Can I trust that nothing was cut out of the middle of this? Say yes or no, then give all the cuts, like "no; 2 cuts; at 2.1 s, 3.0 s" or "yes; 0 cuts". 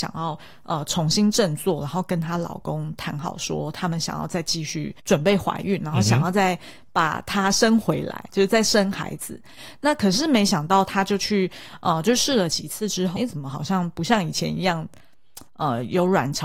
no; 3 cuts; at 5.0 s, 13.2 s, 15.5 s